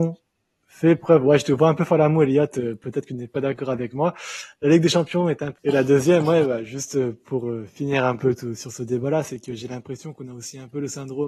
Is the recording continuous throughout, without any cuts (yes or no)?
no